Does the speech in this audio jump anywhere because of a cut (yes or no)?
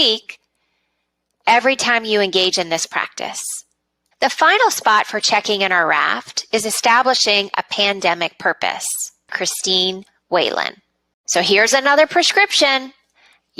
yes